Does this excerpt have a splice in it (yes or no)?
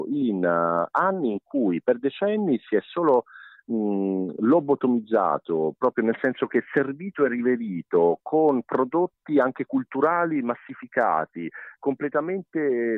no